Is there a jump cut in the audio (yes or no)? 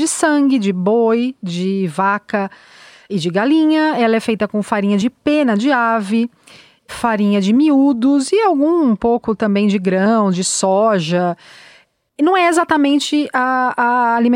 no